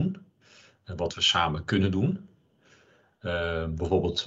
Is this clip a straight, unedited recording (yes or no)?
yes